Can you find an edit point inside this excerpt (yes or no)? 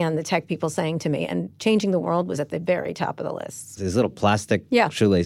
yes